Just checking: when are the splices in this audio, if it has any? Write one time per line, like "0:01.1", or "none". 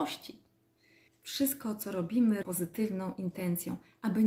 0:01.1
0:02.4